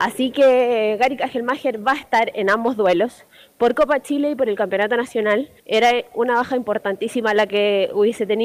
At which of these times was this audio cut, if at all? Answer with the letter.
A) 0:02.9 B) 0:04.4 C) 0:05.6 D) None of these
C